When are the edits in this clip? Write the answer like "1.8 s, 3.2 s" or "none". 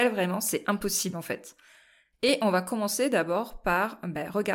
2.1 s